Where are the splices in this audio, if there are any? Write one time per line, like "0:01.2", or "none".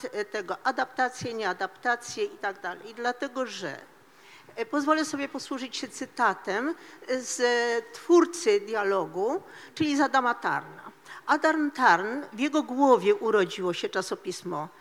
none